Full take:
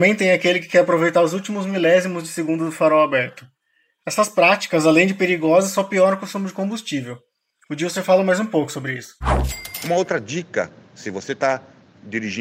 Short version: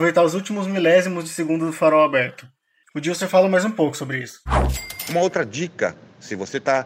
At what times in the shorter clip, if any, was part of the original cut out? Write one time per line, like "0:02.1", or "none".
0:02.8